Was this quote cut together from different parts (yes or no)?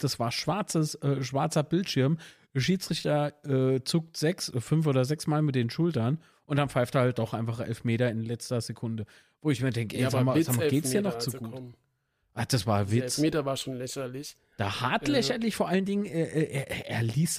no